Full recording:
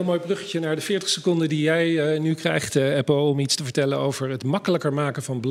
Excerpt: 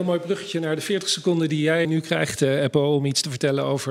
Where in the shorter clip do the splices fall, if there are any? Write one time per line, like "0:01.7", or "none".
0:01.8